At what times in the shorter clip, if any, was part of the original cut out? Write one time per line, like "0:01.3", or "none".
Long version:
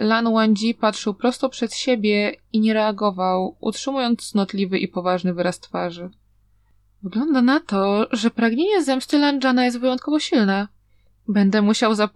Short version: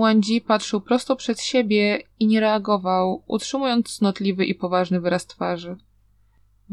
none